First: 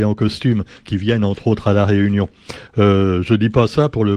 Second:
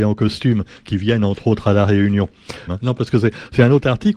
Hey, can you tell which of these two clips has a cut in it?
second; 1 cut; at 2.7 s

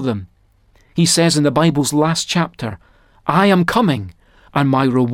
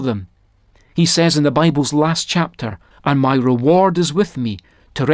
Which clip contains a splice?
second; 1 cut; at 2.9 s

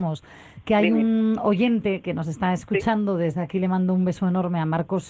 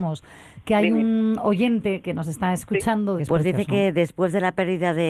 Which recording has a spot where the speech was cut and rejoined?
second; 1 cut; at 3.2 s

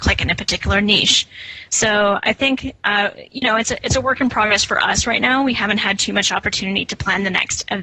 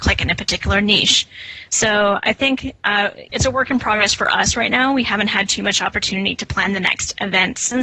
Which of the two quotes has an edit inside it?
second; 1 cut; at 3.3 s

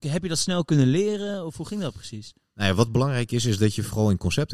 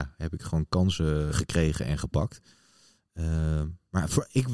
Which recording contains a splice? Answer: second; 1 cut; at 1.3 s

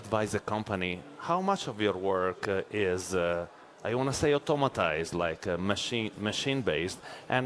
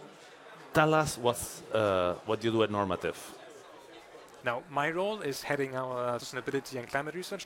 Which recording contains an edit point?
second; 2 cuts; at 4.4 s, 6.2 s

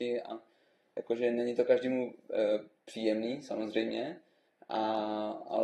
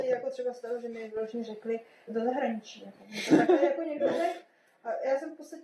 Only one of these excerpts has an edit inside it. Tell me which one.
second; 1 cut; at 2.1 s

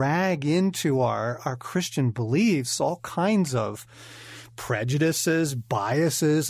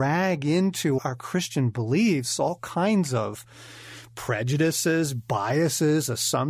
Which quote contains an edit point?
second; 1 cut; at 1.0 s

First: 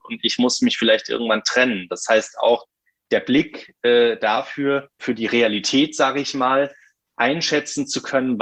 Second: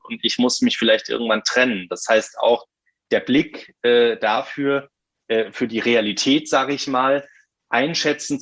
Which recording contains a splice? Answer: first; 1 cut; at 5.0 s

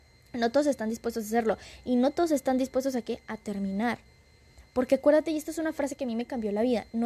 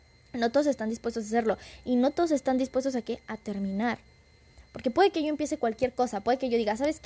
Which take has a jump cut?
second; 1 cut; at 4.7 s

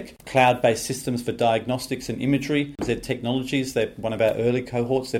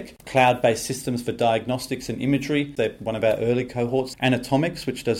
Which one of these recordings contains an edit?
second; 2 cuts; at 2.8 s, 4.1 s

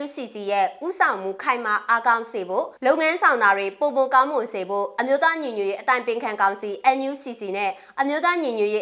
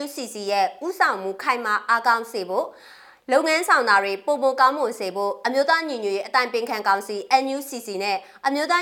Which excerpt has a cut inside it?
first; 1 cut; at 2.8 s

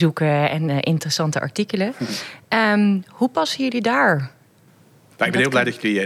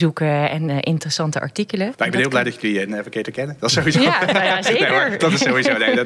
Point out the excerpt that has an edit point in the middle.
second; 1 cut; at 1.9 s

